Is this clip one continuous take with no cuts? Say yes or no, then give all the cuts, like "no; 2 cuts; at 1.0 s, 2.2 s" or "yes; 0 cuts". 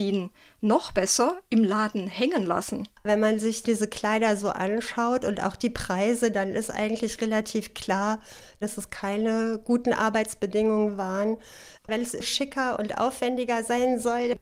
no; 2 cuts; at 8.6 s, 11.7 s